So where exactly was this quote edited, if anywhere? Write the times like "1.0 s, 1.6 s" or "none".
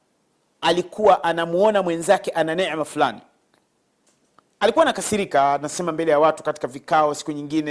none